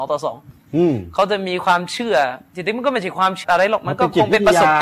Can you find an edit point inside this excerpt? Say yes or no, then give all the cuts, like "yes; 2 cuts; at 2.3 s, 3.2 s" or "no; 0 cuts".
yes; 1 cut; at 3.4 s